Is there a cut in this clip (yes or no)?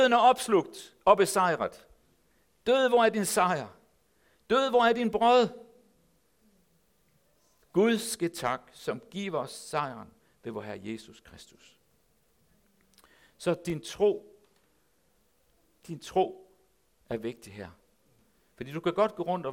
no